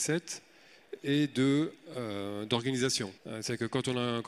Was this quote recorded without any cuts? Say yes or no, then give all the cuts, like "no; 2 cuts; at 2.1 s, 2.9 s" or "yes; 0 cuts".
no; 1 cut; at 3.2 s